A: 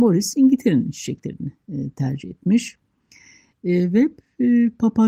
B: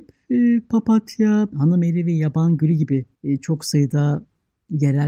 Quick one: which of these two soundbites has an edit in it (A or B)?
B